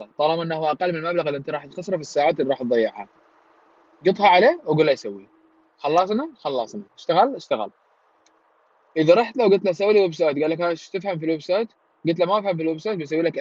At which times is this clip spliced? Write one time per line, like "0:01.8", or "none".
none